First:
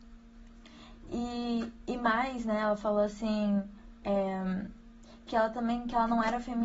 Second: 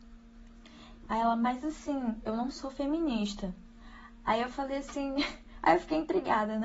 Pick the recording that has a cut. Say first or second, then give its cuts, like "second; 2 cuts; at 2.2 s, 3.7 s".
second; 1 cut; at 1.1 s